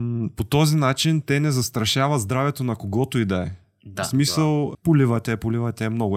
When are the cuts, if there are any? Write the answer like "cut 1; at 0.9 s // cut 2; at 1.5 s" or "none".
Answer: cut 1; at 4.7 s

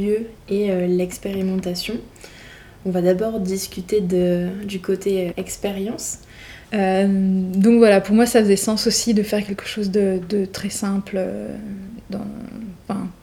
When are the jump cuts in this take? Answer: cut 1; at 5.3 s // cut 2; at 6.6 s

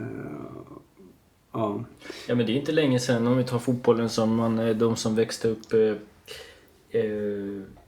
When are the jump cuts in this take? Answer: none

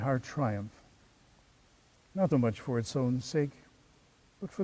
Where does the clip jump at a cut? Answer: cut 1; at 2.3 s

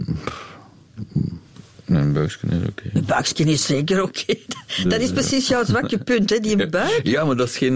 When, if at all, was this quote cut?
none

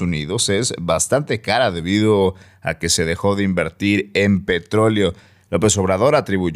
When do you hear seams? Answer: none

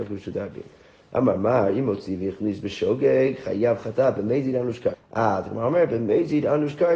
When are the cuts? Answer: cut 1; at 4.9 s

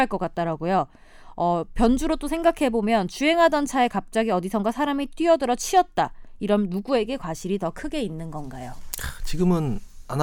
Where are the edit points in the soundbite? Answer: none

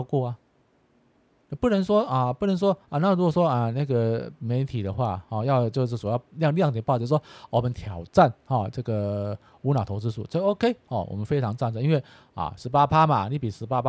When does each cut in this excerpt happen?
none

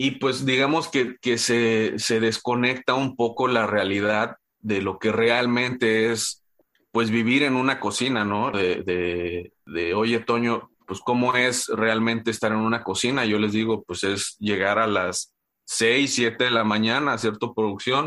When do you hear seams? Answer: cut 1; at 8.5 s

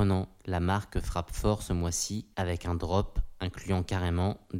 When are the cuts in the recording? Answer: cut 1; at 2.3 s

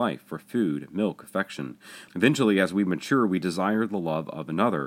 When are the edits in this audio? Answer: cut 1; at 2.1 s

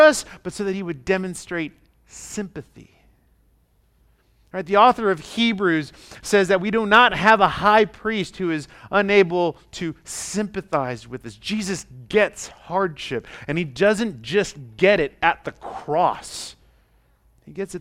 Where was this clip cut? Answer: none

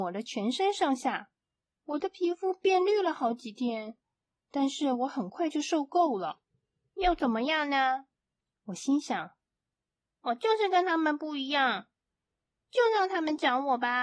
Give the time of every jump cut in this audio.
none

